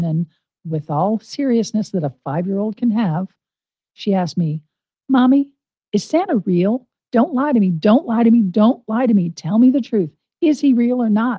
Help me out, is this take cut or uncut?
uncut